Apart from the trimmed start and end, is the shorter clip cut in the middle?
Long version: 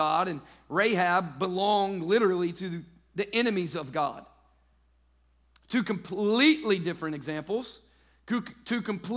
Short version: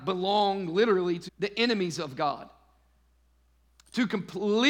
yes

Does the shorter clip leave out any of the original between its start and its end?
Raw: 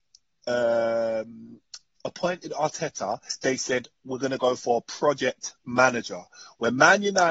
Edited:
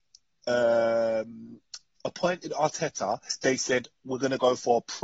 no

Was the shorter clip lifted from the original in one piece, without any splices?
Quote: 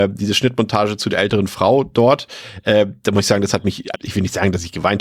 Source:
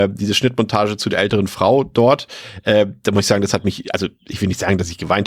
no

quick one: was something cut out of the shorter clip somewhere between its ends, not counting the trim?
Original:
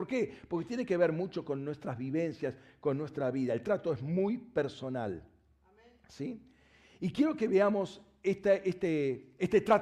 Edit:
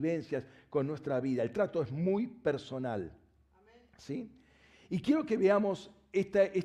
no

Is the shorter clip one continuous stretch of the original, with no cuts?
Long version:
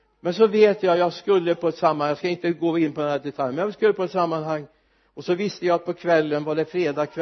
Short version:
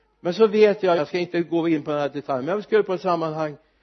no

